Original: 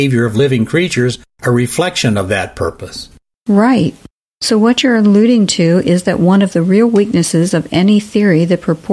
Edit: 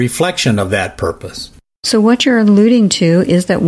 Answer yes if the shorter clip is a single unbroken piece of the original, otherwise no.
no